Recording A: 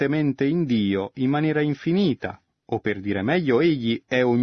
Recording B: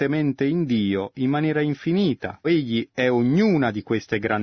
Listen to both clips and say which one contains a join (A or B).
B